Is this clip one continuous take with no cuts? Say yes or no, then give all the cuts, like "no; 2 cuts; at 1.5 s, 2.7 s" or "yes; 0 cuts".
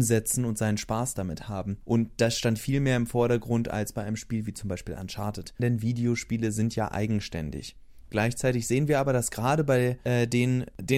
no; 1 cut; at 5.6 s